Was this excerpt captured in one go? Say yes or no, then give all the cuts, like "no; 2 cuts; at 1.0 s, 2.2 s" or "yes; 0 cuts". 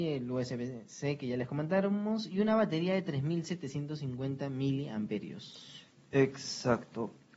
yes; 0 cuts